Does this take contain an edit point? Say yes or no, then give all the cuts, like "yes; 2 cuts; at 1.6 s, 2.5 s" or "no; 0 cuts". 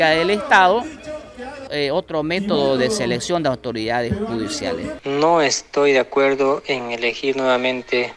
yes; 2 cuts; at 1.7 s, 5.0 s